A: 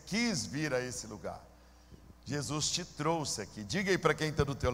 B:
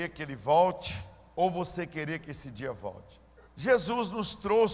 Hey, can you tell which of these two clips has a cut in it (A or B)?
B